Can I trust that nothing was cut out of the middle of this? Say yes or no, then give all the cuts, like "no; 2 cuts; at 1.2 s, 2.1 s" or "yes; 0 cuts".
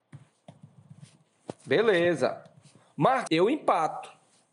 no; 1 cut; at 3.3 s